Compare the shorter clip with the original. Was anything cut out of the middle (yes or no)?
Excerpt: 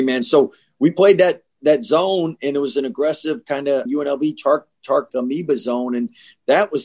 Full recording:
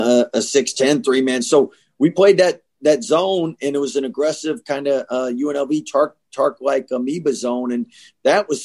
yes